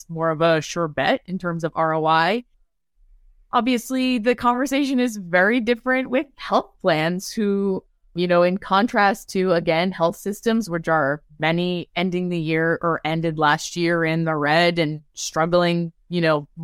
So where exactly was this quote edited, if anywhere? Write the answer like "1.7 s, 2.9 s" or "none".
none